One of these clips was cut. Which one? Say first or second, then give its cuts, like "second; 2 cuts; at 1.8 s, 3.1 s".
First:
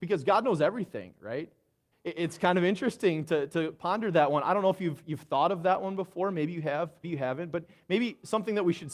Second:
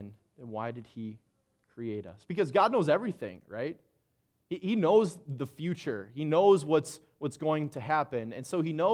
first; 2 cuts; at 1.9 s, 7.0 s